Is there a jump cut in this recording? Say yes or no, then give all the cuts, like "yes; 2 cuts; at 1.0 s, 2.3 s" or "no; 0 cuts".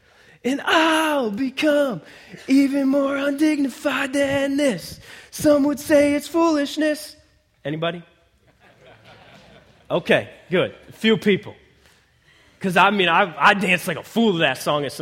no; 0 cuts